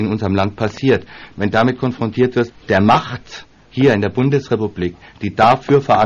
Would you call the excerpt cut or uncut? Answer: cut